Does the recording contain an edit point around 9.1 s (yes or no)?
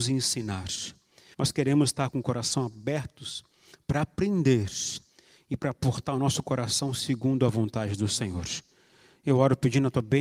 no